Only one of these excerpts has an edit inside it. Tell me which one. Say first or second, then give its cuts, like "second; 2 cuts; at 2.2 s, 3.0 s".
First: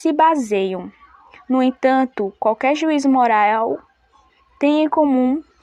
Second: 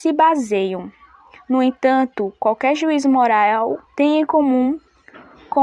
second; 1 cut; at 3.9 s